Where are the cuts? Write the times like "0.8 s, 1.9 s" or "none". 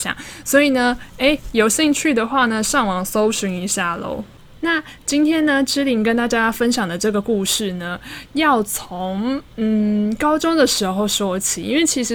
4.6 s